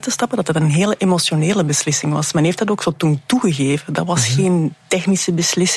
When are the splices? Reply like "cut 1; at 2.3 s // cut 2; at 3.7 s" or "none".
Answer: none